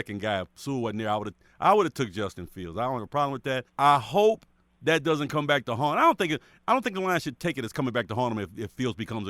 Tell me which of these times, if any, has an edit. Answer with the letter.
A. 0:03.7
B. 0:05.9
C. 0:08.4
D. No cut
A